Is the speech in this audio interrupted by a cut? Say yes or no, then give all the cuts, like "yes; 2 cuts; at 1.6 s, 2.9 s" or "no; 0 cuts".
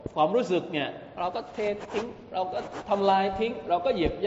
no; 0 cuts